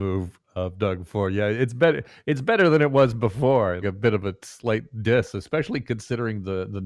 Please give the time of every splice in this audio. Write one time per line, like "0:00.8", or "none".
0:03.8

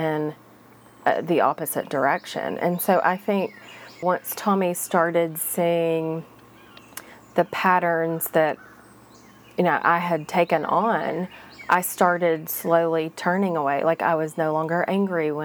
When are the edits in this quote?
0:04.0

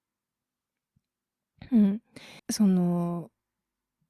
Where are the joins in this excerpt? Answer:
0:02.4

